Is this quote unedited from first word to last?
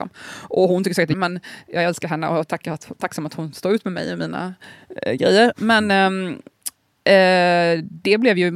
no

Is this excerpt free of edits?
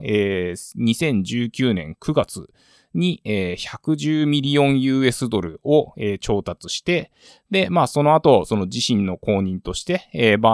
yes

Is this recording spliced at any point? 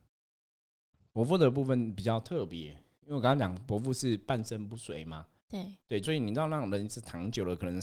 yes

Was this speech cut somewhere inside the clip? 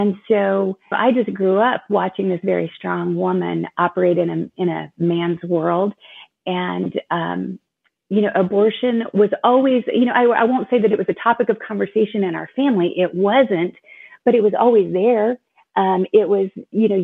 yes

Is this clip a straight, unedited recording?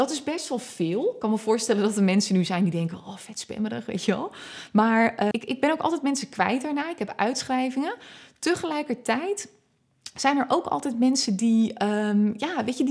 no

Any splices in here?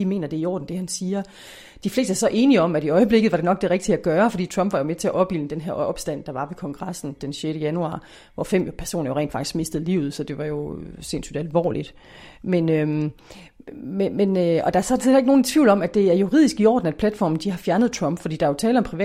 no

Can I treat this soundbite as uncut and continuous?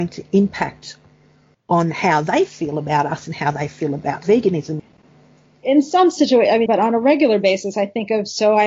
no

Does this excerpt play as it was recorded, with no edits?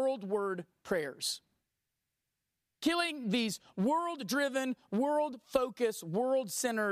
yes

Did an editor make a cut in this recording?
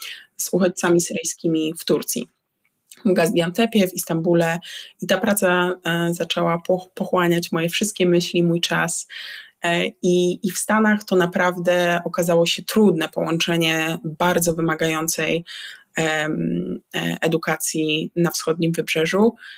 no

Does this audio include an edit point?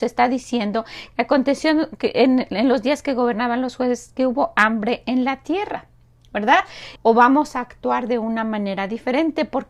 yes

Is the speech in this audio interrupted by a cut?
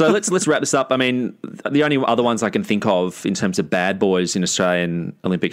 no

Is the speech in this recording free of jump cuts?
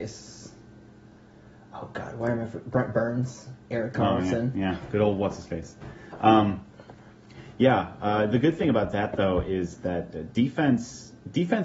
yes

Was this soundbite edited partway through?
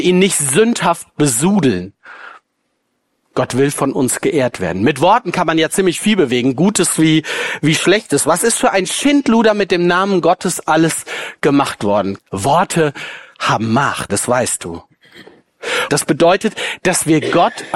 yes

